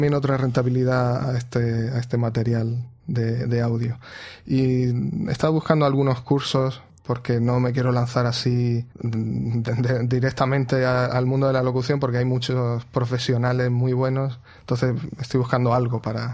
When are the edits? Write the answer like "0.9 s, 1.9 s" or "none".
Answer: 8.9 s